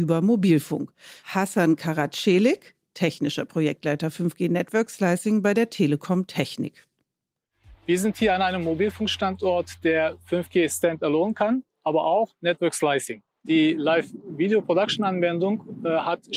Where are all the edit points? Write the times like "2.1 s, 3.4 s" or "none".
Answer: none